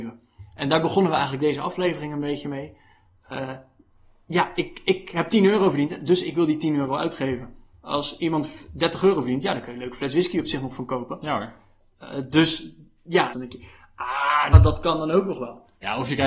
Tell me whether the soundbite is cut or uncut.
cut